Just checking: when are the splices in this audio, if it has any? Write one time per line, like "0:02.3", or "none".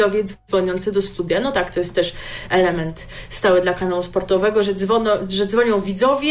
none